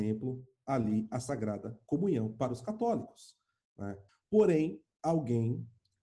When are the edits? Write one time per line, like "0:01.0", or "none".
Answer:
0:04.1